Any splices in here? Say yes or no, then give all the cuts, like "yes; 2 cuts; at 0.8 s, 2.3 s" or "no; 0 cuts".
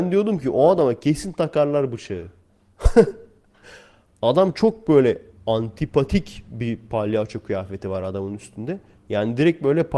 no; 0 cuts